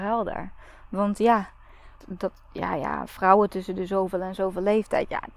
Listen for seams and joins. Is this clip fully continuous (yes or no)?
no